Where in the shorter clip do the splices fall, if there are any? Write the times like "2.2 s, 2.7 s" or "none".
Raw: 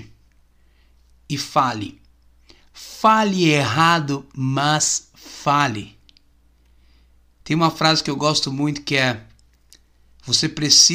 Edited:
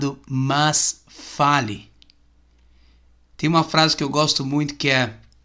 none